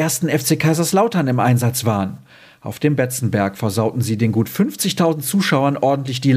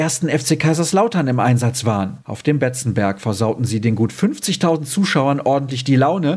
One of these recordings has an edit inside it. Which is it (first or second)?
second